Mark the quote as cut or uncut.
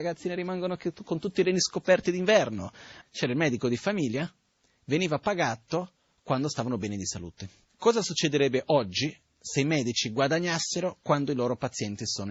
cut